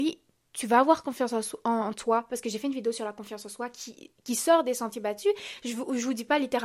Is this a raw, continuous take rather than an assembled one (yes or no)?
yes